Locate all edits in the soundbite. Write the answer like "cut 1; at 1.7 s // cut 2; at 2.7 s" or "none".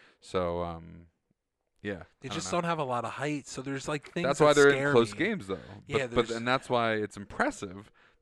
none